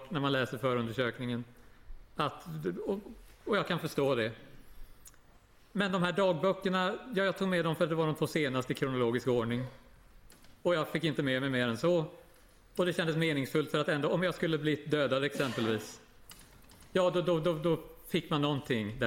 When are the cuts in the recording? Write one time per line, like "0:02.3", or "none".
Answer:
none